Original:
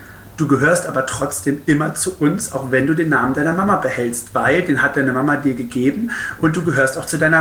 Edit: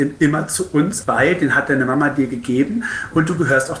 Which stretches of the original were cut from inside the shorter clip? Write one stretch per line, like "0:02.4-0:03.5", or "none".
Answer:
0:02.5-0:04.3